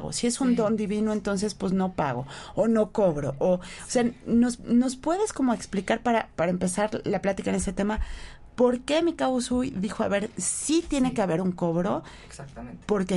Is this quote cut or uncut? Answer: uncut